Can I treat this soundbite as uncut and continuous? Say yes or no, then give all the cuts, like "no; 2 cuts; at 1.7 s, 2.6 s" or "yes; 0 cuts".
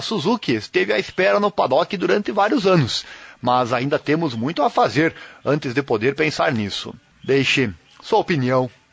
no; 1 cut; at 7.1 s